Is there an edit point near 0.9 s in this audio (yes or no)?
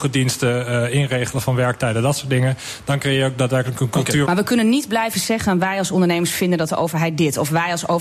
no